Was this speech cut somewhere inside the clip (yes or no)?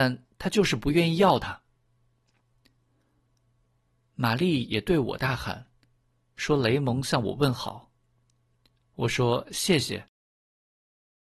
no